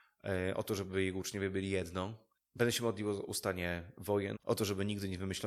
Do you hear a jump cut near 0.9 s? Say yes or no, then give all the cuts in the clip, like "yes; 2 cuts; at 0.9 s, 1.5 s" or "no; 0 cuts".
no; 2 cuts; at 2.3 s, 4.4 s